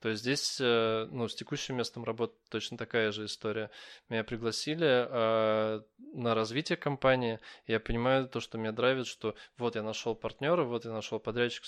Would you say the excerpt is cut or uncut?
uncut